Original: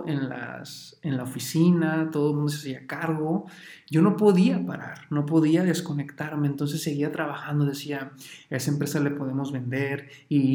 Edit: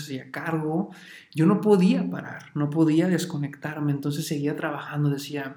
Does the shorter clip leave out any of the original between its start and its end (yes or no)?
no